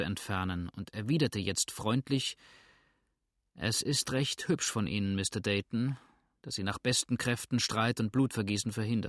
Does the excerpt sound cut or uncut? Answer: uncut